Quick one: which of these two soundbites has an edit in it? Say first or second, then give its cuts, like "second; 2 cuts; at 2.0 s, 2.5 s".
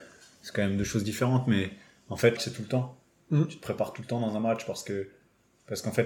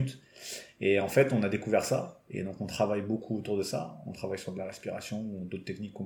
first; 1 cut; at 2.4 s